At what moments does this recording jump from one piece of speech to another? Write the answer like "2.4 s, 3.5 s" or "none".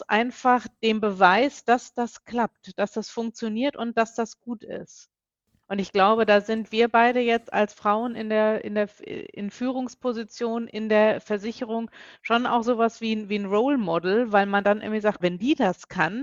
5.6 s, 15.2 s